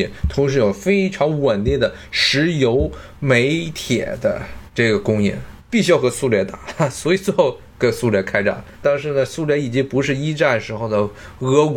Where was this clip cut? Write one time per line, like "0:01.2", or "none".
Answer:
0:05.6